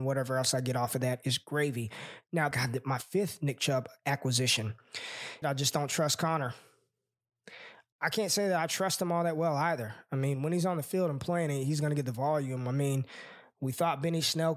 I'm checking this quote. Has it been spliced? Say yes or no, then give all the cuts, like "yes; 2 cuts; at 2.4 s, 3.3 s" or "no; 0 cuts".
yes; 2 cuts; at 2.5 s, 5.4 s